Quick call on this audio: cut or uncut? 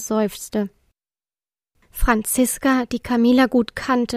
uncut